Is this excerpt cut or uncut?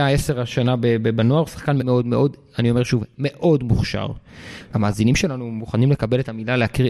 cut